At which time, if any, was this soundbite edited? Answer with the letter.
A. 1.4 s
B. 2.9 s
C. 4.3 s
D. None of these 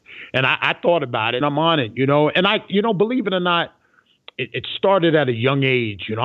A